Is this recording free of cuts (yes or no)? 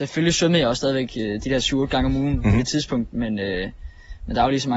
yes